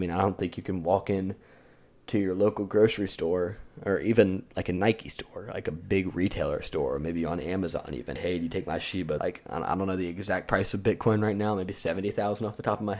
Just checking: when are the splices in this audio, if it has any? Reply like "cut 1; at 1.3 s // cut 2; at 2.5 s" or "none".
cut 1; at 8.2 s // cut 2; at 9.2 s